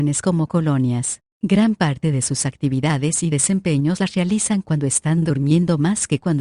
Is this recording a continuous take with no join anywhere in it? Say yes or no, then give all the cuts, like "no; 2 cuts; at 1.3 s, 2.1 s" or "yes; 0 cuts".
yes; 0 cuts